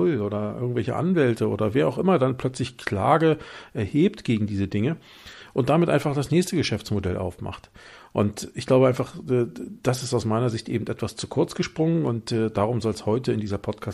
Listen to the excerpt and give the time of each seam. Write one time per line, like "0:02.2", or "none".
none